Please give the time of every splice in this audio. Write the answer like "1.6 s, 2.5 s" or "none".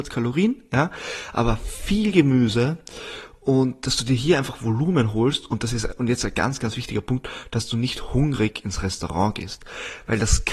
none